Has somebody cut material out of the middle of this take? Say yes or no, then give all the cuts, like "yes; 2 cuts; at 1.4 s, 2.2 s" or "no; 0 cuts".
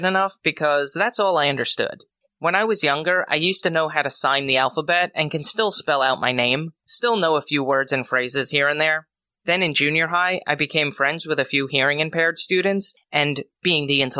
yes; 1 cut; at 2.3 s